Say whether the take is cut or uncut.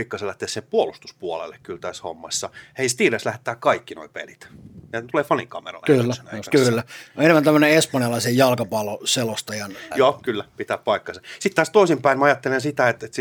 cut